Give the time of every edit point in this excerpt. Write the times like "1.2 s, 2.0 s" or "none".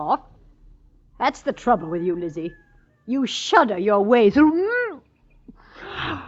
none